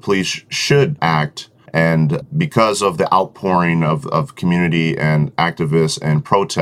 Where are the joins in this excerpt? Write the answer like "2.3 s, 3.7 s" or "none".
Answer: 1.7 s

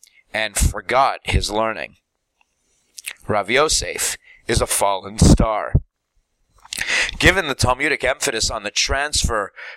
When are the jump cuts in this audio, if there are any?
none

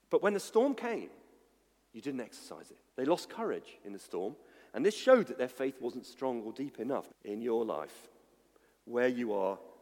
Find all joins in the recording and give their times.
2.9 s, 7.1 s

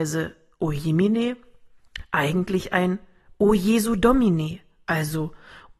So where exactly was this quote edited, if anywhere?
none

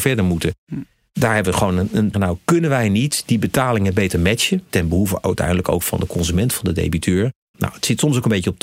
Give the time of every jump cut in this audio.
2.1 s, 4.7 s, 7.5 s

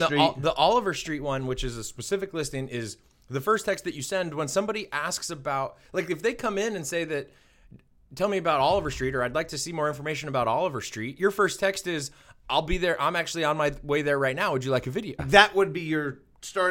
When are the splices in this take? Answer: 15.2 s

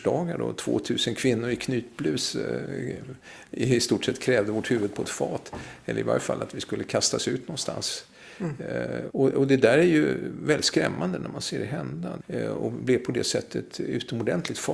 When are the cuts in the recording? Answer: 9.1 s, 12.2 s

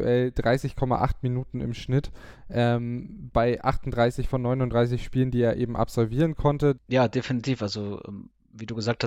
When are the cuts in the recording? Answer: 6.8 s

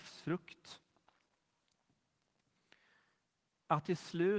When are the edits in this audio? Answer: none

